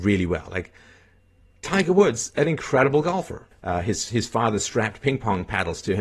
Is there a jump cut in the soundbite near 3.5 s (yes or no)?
yes